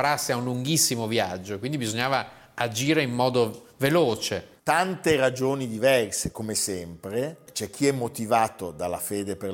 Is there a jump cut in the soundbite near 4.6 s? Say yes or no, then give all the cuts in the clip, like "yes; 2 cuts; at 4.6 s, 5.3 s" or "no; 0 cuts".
yes; 1 cut; at 4.6 s